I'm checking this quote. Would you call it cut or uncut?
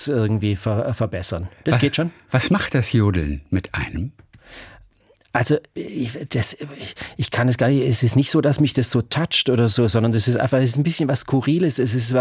uncut